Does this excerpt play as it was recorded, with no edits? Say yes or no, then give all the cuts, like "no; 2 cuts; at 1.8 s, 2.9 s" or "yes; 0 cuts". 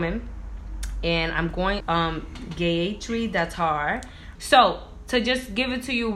no; 2 cuts; at 1.8 s, 4.4 s